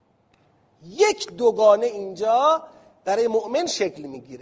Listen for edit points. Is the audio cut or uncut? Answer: uncut